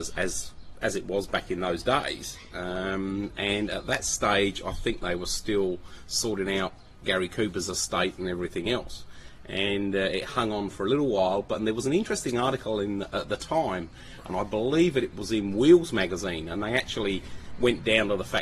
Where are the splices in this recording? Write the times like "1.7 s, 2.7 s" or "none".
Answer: none